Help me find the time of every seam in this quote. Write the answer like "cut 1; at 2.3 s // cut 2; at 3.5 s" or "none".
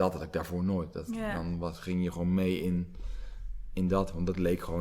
none